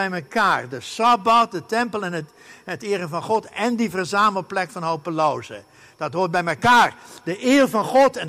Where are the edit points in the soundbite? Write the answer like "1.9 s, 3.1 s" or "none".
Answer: none